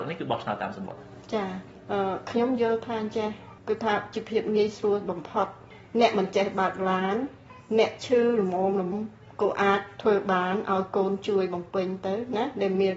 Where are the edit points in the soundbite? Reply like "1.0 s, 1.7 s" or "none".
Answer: 8.9 s